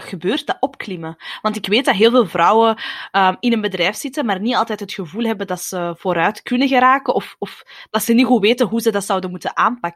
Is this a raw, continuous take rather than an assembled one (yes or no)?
yes